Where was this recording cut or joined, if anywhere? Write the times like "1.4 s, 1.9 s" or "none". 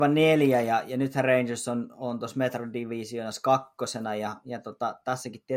none